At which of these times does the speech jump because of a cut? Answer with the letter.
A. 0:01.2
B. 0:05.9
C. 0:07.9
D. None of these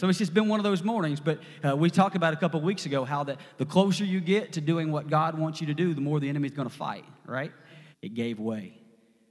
C